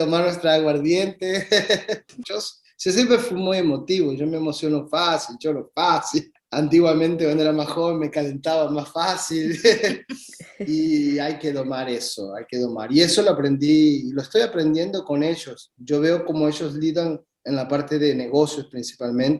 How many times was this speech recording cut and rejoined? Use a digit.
1